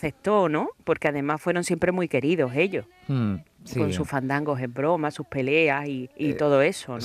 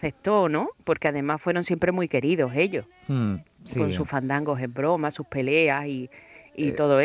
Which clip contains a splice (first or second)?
first